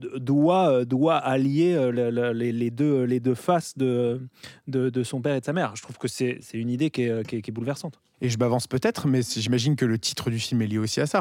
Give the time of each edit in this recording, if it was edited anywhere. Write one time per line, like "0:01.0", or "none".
none